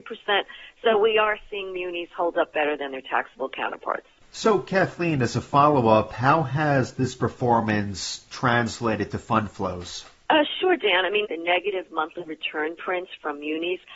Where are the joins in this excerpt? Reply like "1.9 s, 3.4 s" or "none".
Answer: 11.2 s